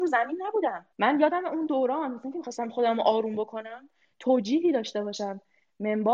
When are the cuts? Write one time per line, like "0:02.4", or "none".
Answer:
0:00.9